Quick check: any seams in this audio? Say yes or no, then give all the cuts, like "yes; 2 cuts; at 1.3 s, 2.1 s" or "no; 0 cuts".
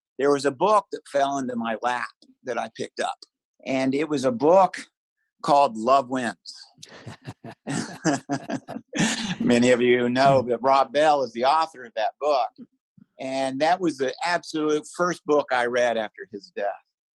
no; 0 cuts